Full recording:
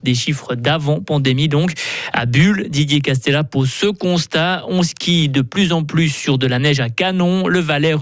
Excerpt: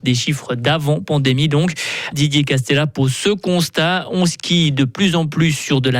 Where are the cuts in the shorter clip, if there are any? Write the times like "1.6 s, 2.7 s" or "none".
2.1 s

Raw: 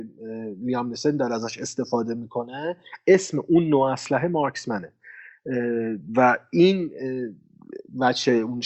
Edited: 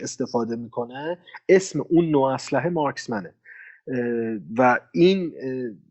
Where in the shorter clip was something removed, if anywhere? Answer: none

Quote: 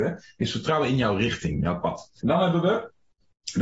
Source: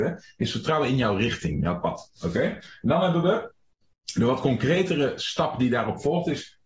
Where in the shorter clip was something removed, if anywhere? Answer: 2.2 s

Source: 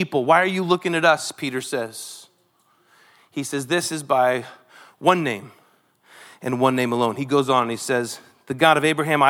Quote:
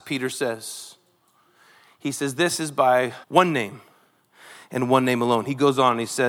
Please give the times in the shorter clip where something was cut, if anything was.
3.2 s

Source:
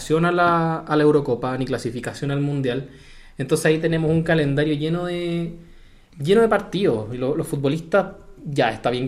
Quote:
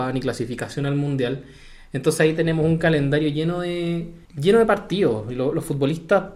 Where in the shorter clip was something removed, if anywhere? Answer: 4.2 s

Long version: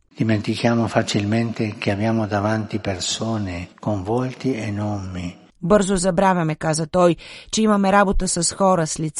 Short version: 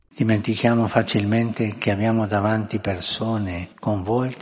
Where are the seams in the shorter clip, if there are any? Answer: none

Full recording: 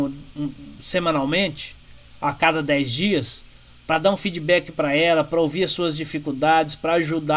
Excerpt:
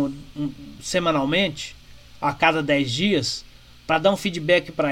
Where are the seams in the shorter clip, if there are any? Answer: none

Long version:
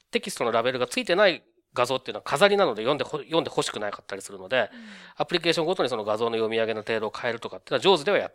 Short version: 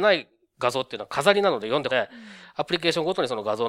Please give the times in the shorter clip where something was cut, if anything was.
1.9 s

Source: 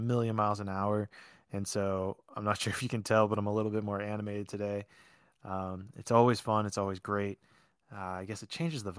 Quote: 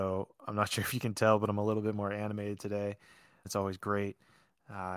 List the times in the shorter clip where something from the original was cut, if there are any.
3.4 s

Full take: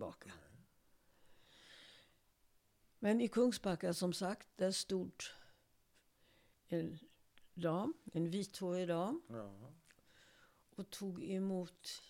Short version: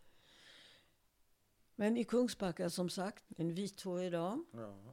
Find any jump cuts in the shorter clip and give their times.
3.3 s

